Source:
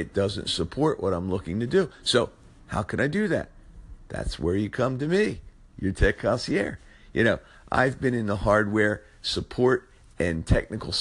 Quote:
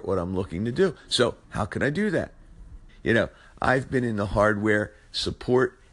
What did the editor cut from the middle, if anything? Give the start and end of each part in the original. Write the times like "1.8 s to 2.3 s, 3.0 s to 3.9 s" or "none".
2.4 s to 2.6 s, 4.1 s to 7.0 s